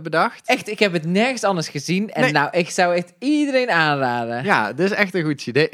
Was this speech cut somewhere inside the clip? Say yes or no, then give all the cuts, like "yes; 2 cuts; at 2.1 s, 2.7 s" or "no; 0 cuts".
no; 0 cuts